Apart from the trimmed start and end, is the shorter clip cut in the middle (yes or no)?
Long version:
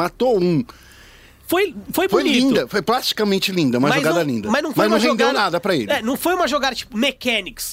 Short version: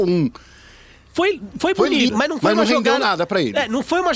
yes